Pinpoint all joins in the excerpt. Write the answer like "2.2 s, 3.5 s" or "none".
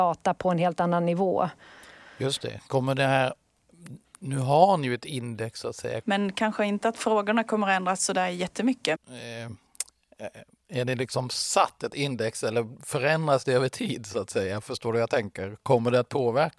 6.0 s, 8.9 s

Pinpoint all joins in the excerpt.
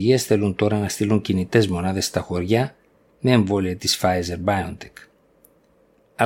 none

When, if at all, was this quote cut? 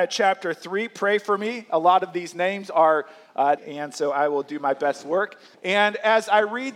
3.6 s, 5.5 s

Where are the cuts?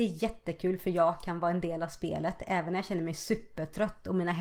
none

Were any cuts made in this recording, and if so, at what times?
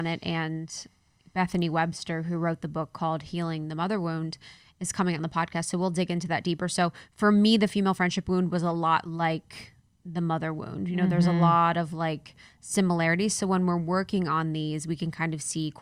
none

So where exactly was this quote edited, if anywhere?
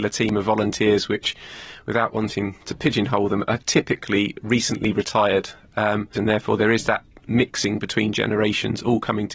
2.6 s, 6.2 s

